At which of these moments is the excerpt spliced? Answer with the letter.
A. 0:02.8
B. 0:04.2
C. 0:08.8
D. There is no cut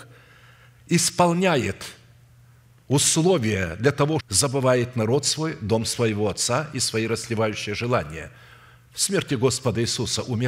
B